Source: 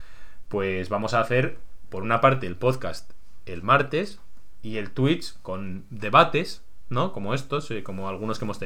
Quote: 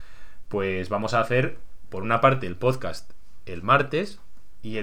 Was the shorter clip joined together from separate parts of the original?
no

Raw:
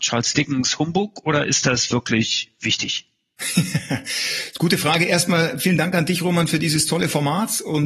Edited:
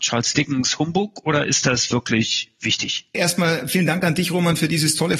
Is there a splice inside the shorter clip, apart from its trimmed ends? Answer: yes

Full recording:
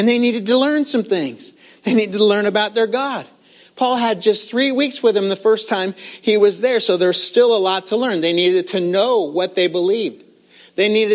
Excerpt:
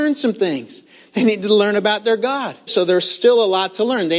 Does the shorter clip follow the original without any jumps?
no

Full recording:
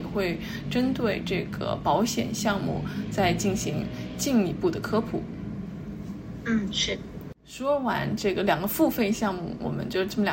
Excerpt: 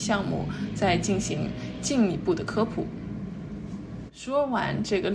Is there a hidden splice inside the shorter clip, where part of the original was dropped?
yes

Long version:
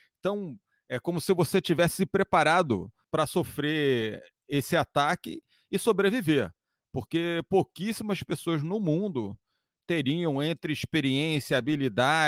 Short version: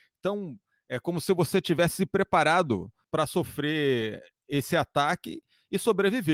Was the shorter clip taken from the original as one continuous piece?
yes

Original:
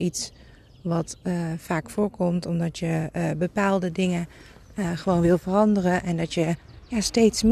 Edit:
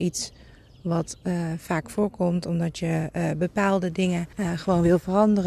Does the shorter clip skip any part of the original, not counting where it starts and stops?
yes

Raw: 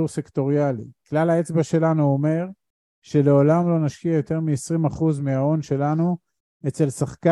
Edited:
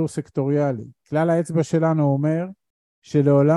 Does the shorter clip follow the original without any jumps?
yes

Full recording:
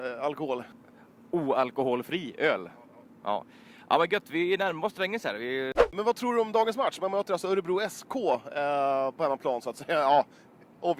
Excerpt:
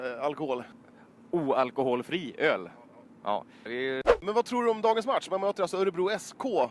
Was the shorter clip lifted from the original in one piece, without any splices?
no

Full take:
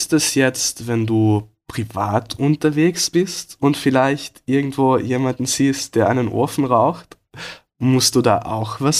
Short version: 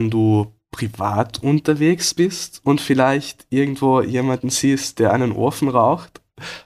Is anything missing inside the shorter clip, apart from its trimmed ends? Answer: no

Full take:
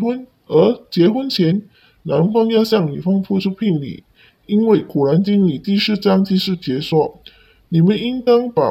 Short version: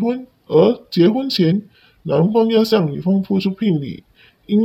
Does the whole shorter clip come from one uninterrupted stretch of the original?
yes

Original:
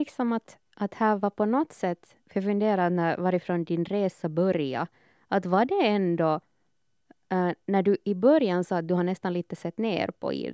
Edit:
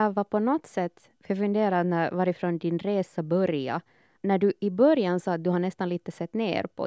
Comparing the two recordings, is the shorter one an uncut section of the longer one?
no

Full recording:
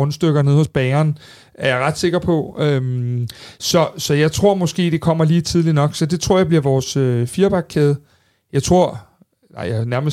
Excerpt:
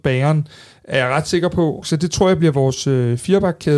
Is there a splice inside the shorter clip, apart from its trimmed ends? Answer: yes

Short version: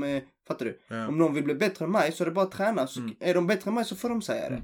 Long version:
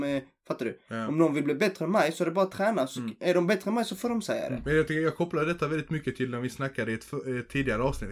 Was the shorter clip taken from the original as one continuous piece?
yes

